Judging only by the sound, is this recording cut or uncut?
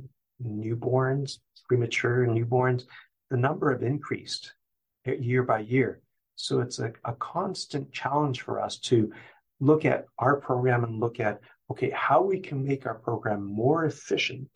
uncut